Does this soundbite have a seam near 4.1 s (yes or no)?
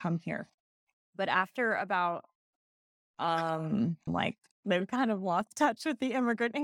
yes